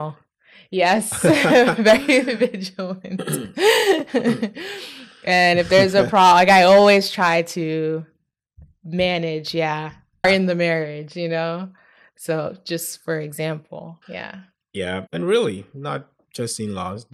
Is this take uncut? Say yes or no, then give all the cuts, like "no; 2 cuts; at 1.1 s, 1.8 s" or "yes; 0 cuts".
no; 3 cuts; at 10.2 s, 14.0 s, 15.1 s